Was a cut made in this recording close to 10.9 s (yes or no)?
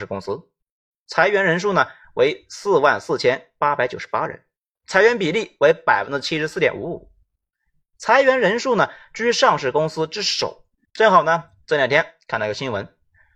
yes